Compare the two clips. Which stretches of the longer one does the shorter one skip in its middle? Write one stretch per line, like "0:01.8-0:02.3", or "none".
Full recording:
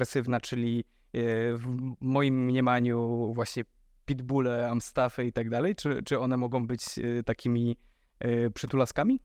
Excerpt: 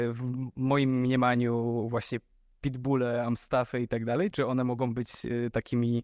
0:05.8-0:06.0